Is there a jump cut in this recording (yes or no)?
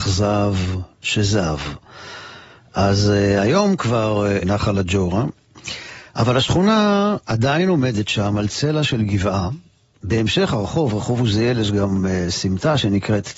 yes